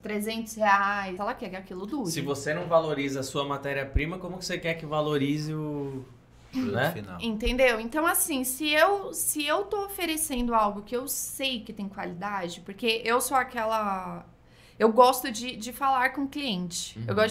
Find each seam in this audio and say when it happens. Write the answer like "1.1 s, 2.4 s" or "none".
1.2 s